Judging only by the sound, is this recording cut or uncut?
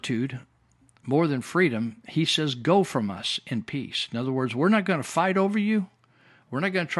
uncut